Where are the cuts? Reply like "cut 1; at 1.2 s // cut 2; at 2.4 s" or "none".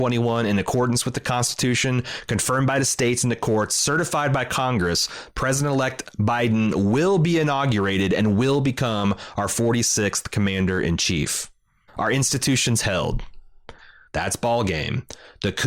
cut 1; at 11.9 s // cut 2; at 14.1 s